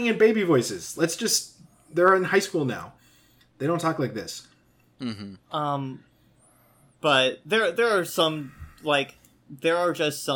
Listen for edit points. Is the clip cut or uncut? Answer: uncut